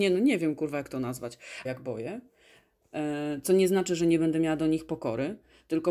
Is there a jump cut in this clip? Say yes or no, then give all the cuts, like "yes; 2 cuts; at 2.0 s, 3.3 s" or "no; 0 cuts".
yes; 1 cut; at 1.6 s